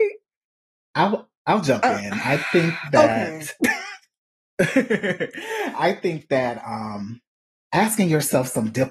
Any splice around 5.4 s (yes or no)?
no